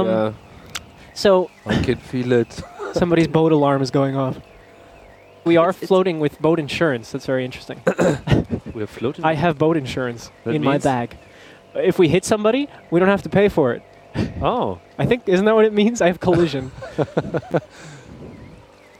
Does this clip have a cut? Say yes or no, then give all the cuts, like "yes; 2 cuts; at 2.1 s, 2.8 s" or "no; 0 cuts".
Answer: yes; 1 cut; at 5.5 s